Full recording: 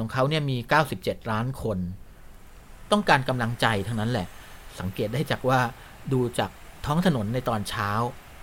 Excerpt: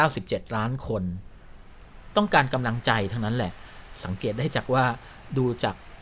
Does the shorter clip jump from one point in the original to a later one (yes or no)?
no